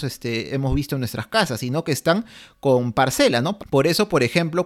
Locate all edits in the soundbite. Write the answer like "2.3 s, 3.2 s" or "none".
3.6 s